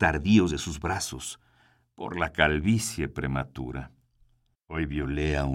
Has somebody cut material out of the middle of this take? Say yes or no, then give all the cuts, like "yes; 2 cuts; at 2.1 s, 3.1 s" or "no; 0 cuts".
yes; 1 cut; at 4.5 s